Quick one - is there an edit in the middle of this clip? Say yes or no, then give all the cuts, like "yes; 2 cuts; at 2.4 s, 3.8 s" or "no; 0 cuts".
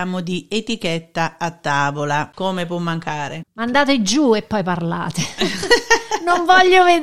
yes; 1 cut; at 3.4 s